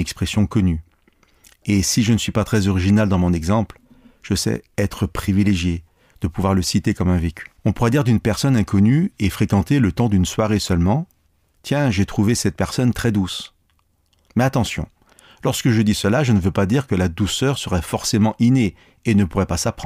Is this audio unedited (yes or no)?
no